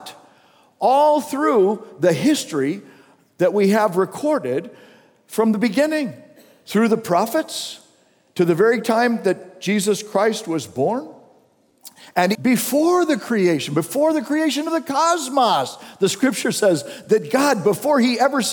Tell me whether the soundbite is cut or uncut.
cut